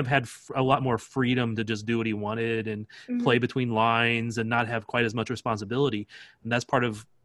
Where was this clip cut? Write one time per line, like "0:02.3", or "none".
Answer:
none